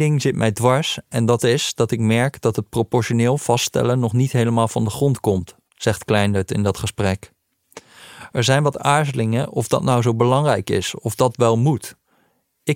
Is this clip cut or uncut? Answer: uncut